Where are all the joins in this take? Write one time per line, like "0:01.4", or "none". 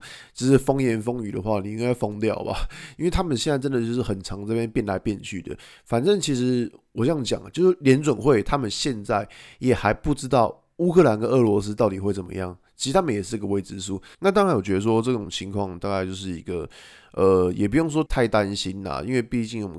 0:14.1
0:18.1